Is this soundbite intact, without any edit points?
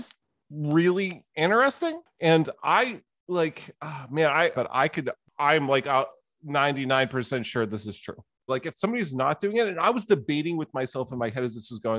no; 2 cuts; at 4.5 s, 8.5 s

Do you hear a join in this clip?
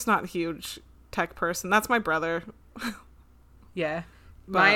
no; 0 cuts

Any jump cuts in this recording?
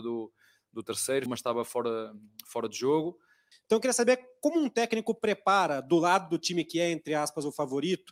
yes; 2 cuts; at 1.3 s, 3.5 s

